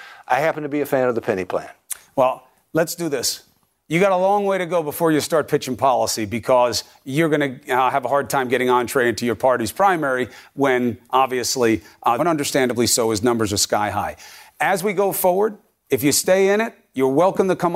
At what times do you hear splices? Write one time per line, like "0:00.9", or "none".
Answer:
0:12.2